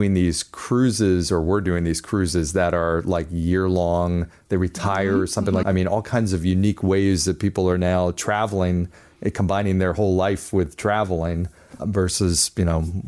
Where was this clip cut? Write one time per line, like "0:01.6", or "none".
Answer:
0:05.6
0:11.8